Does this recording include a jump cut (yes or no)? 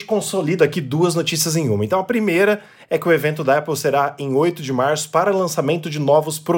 no